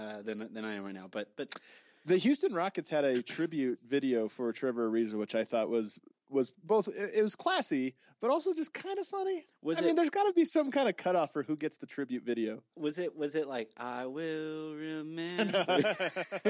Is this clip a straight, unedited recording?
yes; 0 cuts

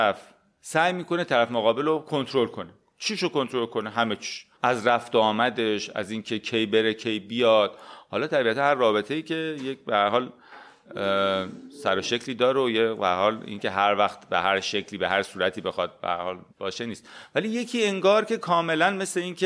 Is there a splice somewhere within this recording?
yes; 2 cuts; at 4.5 s, 16.5 s

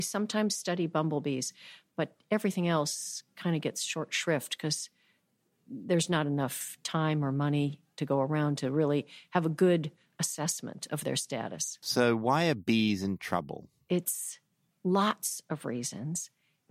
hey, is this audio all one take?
yes; 0 cuts

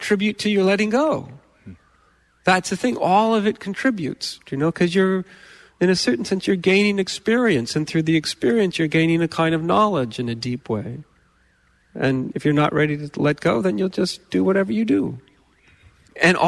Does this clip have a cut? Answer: yes; 1 cut; at 11.8 s

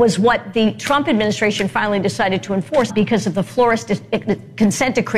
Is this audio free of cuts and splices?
no; 1 cut; at 2.9 s

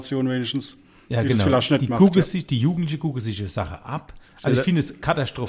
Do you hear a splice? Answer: yes; 1 cut; at 4.3 s

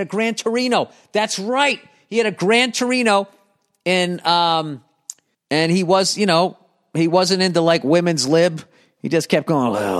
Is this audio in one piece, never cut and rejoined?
no; 1 cut; at 5.3 s

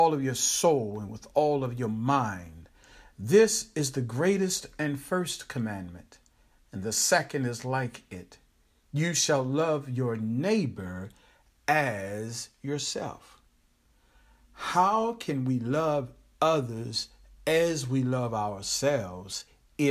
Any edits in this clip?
no; 0 cuts

